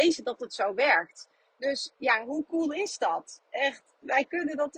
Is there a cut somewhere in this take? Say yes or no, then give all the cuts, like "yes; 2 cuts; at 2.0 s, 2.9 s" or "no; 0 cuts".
no; 0 cuts